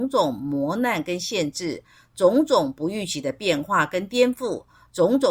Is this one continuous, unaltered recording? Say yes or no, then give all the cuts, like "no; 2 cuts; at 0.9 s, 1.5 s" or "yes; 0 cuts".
yes; 0 cuts